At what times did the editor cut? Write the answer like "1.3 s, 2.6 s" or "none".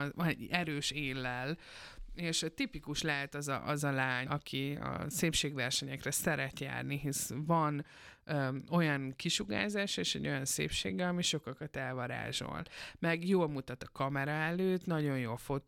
4.3 s